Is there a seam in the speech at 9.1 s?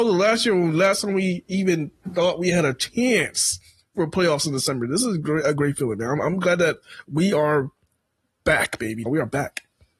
yes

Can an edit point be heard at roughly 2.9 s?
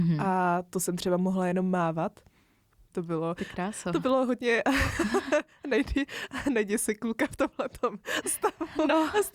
yes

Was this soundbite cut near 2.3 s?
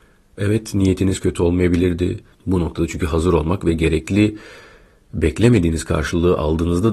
yes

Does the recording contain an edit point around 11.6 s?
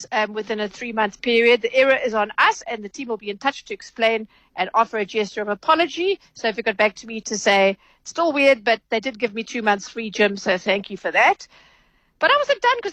no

